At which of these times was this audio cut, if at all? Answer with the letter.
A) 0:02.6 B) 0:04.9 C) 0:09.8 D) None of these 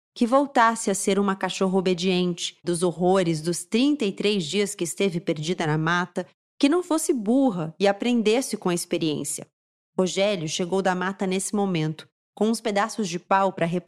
A